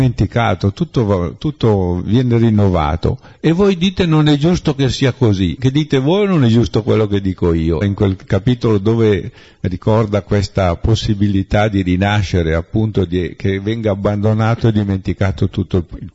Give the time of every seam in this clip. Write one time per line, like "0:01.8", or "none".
0:05.6
0:07.8

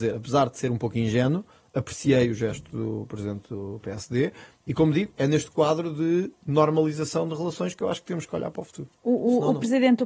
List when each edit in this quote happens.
0:09.0

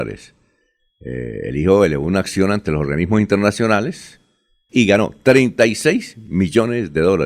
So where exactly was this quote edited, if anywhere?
0:04.7

